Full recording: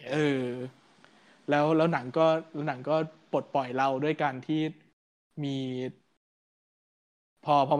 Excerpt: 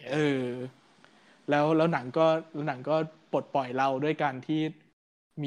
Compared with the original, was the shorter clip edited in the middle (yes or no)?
no